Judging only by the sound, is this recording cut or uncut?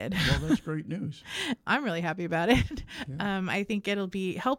cut